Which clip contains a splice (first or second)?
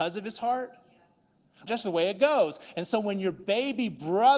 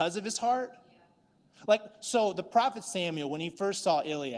first